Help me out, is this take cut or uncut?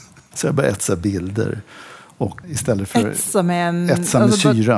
cut